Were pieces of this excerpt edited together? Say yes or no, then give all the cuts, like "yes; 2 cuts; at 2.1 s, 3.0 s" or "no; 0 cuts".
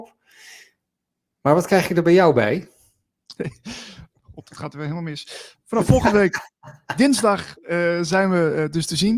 yes; 1 cut; at 3.4 s